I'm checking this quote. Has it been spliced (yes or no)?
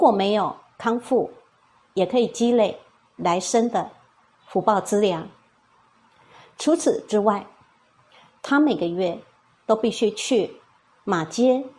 no